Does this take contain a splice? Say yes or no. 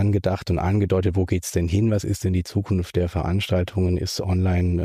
no